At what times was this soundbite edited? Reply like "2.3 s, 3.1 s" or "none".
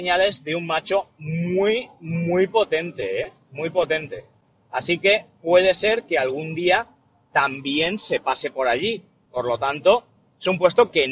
none